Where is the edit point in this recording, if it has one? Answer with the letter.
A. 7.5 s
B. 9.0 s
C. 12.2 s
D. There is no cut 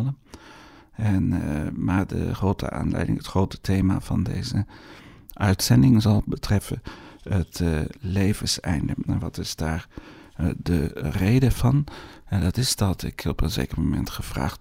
D